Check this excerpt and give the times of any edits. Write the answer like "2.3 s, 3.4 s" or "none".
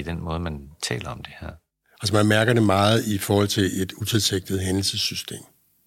none